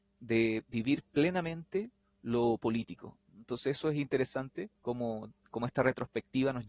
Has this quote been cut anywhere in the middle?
yes; 1 cut; at 4.8 s

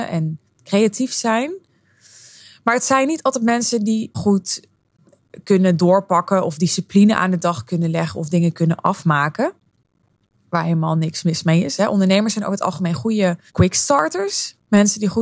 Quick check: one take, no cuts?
no; 3 cuts; at 4.1 s, 11.8 s, 13.5 s

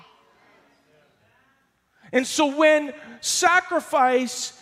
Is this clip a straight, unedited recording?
yes; 0 cuts

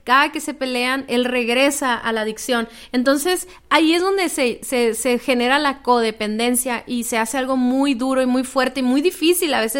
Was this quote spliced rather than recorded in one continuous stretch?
no; 0 cuts

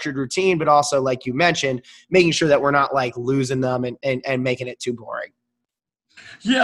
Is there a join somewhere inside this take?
no; 0 cuts

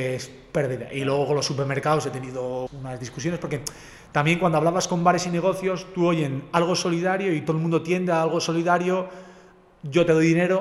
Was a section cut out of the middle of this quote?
yes; 1 cut; at 2.7 s

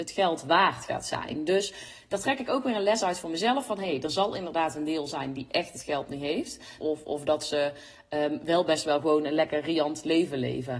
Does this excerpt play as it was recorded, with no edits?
no; 1 cut; at 6.8 s

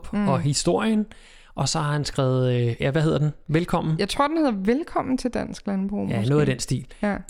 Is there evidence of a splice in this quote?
no; 0 cuts

